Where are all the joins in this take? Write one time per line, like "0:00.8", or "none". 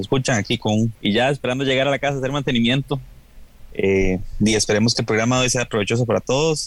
0:00.9